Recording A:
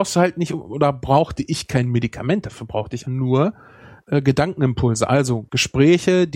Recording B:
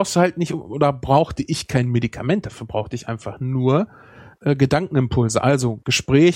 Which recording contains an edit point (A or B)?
A